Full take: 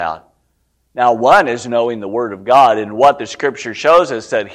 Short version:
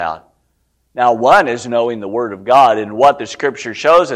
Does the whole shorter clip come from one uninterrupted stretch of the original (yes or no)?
yes